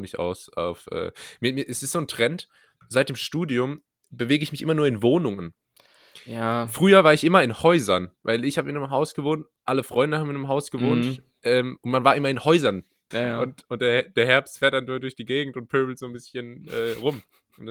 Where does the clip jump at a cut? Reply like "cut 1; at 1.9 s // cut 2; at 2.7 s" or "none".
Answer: cut 1; at 13.1 s